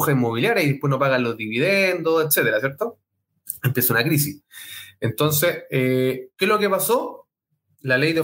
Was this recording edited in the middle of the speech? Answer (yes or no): no